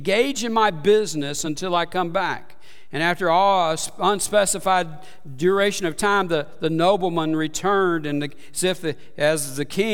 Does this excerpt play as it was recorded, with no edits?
yes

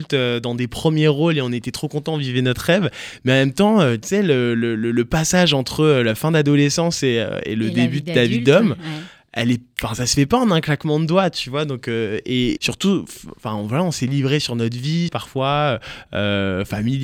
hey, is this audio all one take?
no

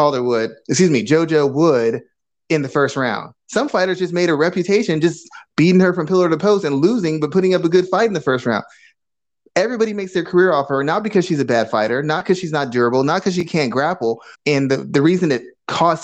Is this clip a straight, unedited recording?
no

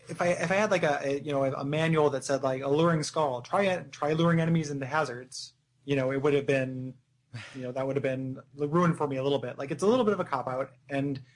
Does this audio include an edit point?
no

